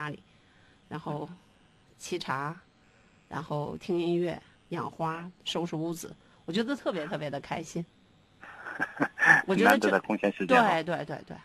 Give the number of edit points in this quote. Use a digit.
1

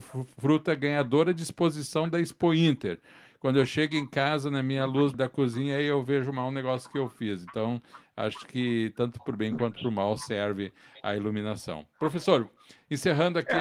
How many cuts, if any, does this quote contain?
1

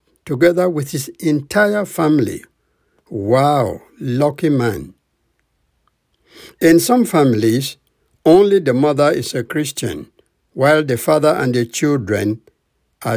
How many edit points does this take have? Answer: 0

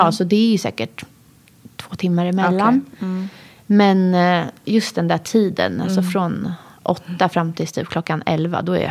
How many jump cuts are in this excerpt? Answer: 0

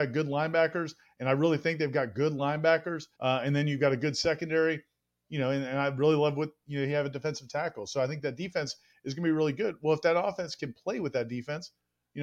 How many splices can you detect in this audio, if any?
1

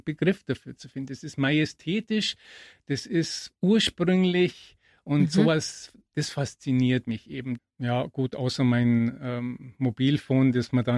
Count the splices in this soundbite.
1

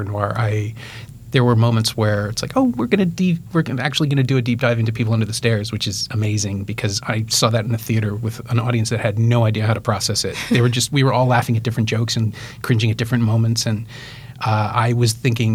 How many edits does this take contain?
0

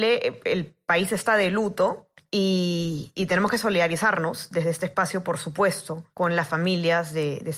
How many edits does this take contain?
1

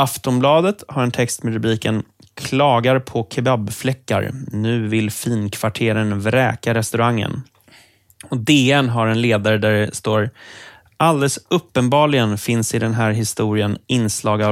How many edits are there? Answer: 0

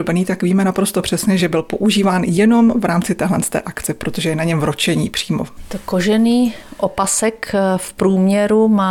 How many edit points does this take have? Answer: 0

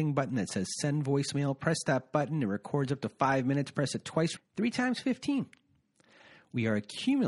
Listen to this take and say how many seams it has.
1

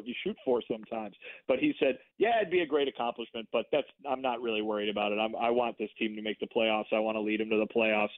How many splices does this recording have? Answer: 0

